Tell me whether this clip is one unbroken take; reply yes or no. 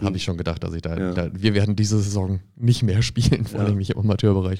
yes